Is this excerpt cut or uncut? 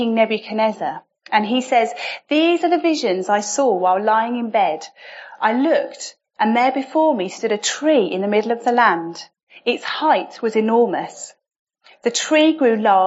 uncut